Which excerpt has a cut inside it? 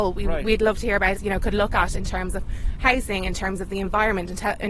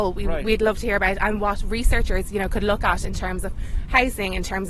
first; 1 cut; at 1.2 s

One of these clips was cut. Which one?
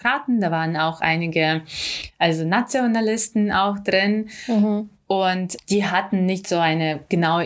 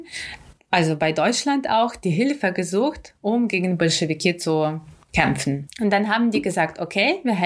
second; 1 cut; at 5.7 s

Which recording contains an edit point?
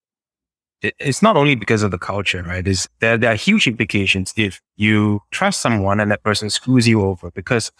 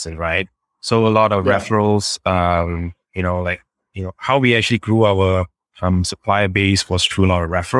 first; 2 cuts; at 2.9 s, 4.7 s

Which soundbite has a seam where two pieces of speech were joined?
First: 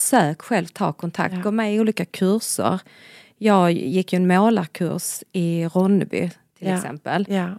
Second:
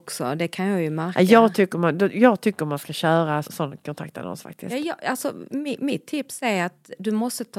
second; 1 cut; at 3.4 s

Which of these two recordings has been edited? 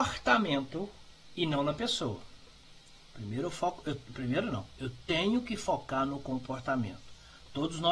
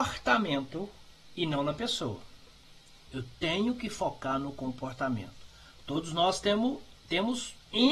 second; 1 cut; at 3.1 s

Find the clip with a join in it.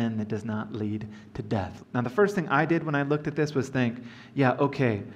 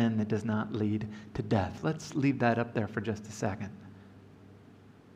first; 1 cut; at 1.8 s

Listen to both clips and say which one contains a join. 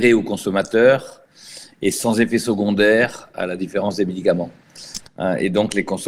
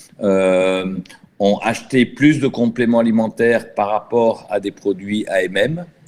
first; 1 cut; at 5.1 s

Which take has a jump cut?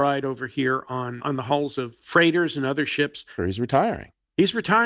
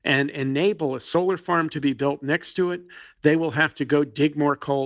first; 2 cuts; at 1.2 s, 3.4 s

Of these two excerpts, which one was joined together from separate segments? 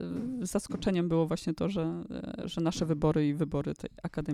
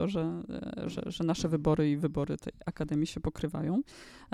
first; 1 cut; at 2.4 s

